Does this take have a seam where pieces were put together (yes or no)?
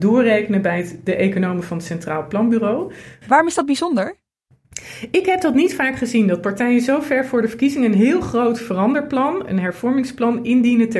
yes